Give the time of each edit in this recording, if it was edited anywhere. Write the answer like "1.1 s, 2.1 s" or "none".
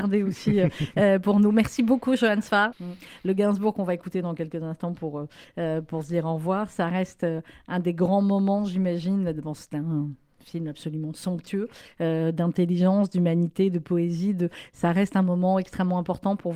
2.7 s